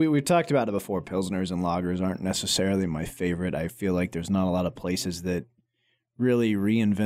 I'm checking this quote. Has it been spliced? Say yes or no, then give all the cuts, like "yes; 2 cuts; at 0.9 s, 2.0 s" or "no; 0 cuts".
no; 0 cuts